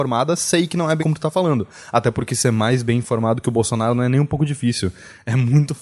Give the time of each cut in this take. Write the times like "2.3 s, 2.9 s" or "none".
1.0 s

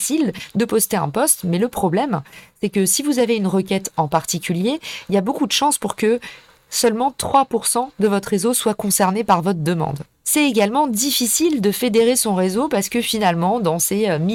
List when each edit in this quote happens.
none

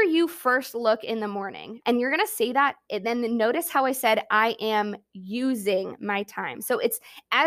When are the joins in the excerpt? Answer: 1.8 s

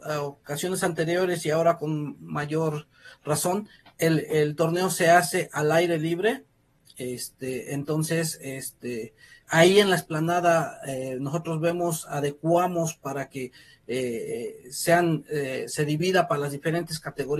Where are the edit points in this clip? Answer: none

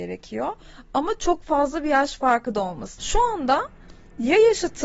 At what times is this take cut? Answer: 3.0 s

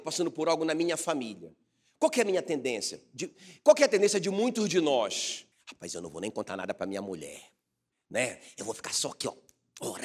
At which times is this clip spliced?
5.5 s, 7.9 s

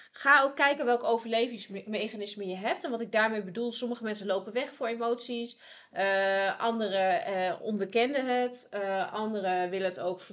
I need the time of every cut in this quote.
none

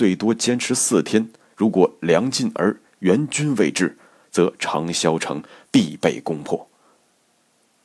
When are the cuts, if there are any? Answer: none

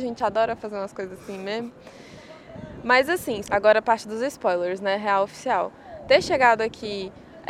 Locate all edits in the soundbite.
3.4 s

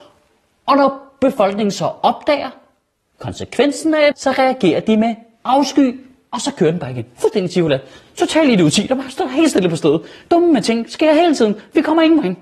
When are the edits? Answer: 4.1 s

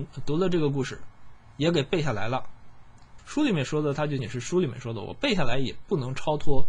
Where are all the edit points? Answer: 3.2 s, 4.2 s

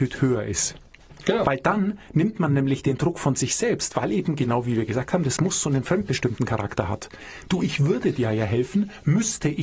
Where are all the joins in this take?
1.2 s

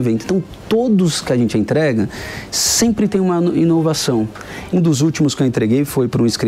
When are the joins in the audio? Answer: 4.7 s

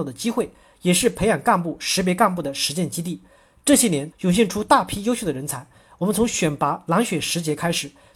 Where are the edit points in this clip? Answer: 4.1 s

